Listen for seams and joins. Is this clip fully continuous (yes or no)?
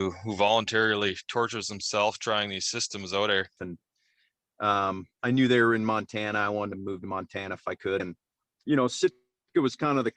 no